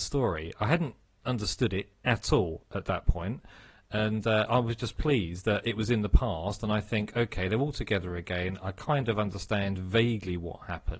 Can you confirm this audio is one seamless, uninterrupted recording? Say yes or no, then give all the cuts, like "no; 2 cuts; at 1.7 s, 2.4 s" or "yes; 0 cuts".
yes; 0 cuts